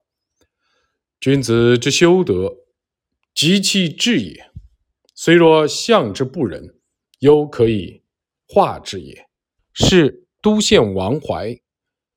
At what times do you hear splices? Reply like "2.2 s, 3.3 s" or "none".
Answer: 9.6 s

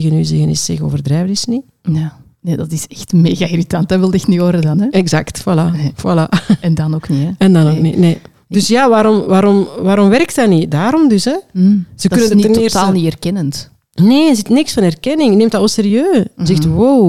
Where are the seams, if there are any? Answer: none

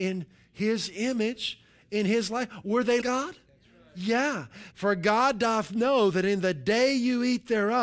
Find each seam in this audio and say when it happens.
3.0 s, 4.7 s

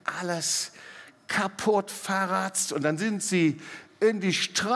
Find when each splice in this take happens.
none

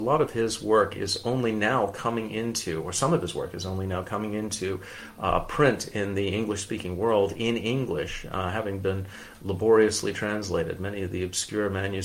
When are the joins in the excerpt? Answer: none

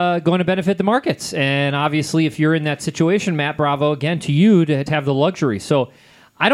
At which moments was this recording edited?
4.9 s

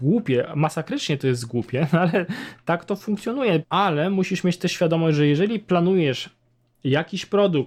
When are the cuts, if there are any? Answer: 3.6 s

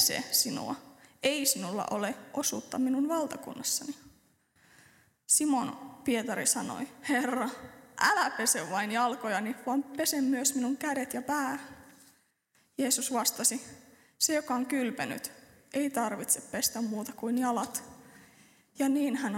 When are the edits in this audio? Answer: none

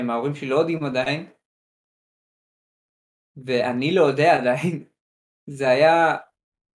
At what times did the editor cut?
none

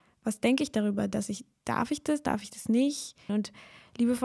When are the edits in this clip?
3.3 s

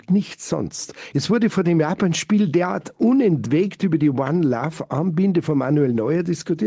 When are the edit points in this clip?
1.1 s

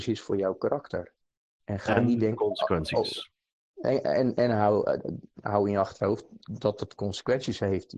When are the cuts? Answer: none

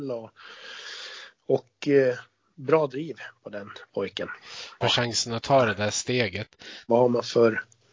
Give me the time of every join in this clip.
4.8 s, 6.9 s

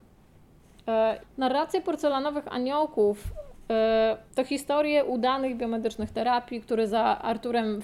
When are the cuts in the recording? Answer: 1.2 s, 4.3 s

